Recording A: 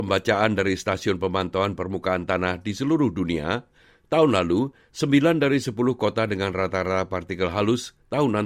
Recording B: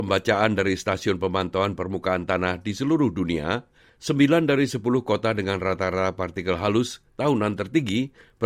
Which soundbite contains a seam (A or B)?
B